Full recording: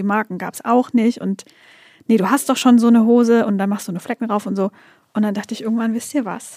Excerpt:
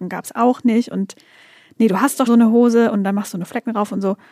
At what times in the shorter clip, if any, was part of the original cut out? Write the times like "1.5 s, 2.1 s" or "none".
2.3 s